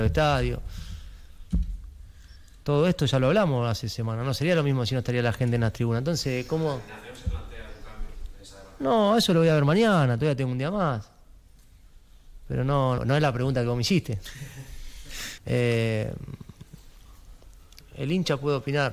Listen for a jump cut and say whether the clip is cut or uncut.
cut